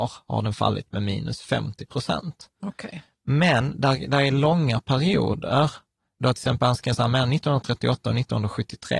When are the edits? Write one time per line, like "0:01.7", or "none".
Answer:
none